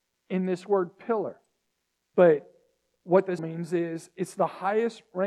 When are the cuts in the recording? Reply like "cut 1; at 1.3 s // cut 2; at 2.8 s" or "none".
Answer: cut 1; at 2.1 s // cut 2; at 3.4 s